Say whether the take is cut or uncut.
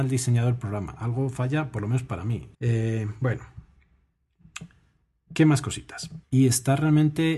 cut